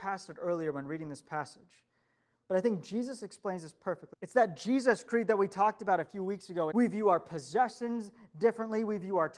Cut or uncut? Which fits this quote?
cut